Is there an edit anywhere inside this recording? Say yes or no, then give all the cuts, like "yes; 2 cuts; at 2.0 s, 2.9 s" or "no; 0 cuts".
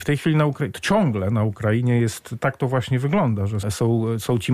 yes; 1 cut; at 3.6 s